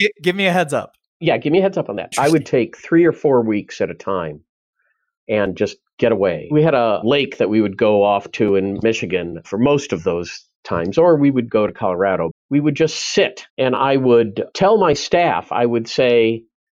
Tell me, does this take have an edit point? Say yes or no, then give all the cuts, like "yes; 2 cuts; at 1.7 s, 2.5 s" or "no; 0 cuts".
yes; 3 cuts; at 2.1 s, 12.3 s, 13.5 s